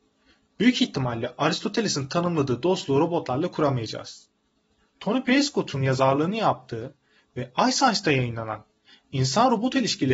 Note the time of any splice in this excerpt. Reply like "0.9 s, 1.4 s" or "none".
4.9 s